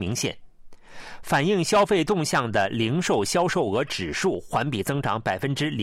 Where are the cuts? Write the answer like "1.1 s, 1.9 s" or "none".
none